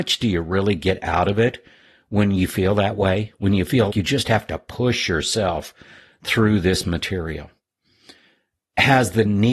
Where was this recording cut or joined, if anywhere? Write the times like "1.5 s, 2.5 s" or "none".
3.9 s